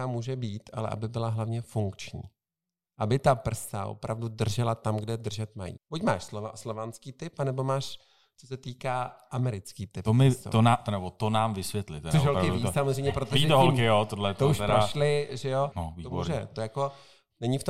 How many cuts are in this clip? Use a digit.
2